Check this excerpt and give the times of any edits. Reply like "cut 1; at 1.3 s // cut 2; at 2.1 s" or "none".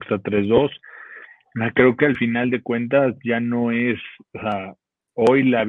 none